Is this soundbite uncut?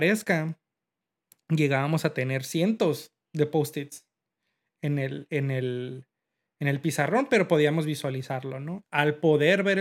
no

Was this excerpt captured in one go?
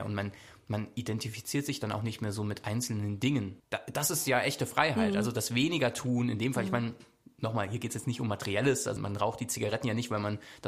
no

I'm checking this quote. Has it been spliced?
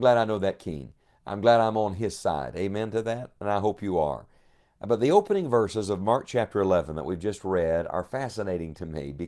no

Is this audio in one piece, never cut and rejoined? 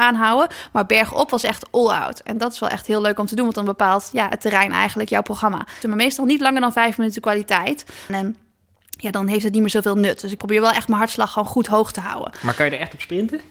no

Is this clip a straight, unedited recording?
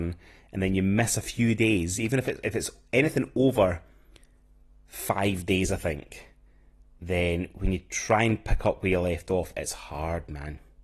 yes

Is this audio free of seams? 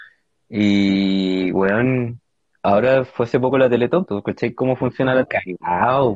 no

